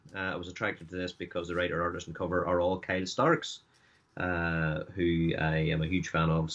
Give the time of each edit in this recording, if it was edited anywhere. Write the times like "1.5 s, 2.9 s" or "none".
none